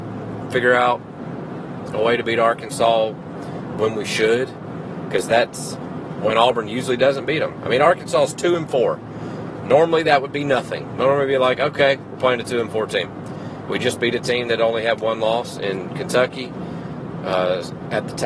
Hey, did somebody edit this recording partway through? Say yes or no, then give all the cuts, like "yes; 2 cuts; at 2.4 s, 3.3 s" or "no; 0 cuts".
no; 0 cuts